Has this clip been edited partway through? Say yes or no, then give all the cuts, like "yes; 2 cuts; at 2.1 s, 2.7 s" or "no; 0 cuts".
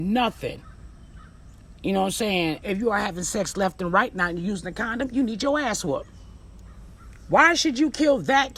yes; 1 cut; at 2.6 s